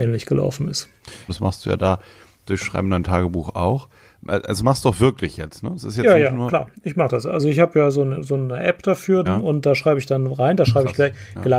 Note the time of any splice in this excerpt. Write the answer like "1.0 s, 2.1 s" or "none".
1.3 s, 9.3 s